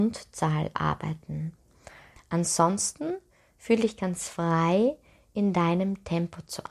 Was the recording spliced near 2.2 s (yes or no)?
yes